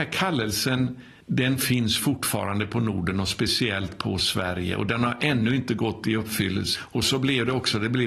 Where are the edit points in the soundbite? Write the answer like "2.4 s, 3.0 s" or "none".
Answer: 1.2 s, 6.8 s

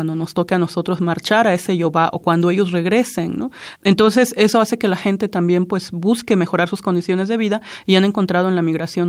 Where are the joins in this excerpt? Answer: 3.8 s

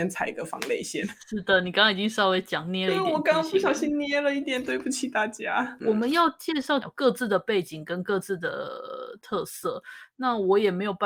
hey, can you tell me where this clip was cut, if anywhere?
5.8 s, 6.8 s

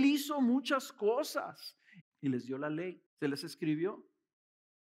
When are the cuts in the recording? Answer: 2.0 s, 3.1 s

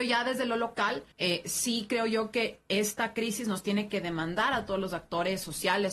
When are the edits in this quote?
1.1 s

